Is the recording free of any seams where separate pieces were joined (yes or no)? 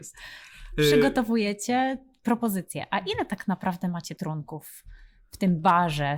yes